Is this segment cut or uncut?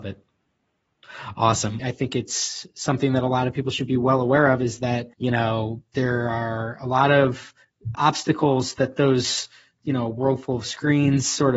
cut